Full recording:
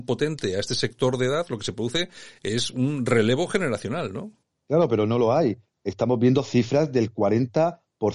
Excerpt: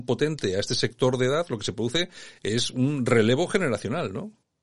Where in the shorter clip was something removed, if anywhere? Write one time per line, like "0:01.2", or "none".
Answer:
none